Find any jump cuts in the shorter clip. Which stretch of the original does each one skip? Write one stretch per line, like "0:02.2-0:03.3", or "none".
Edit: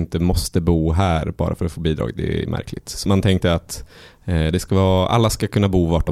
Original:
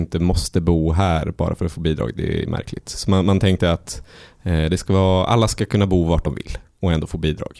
0:03.1-0:03.2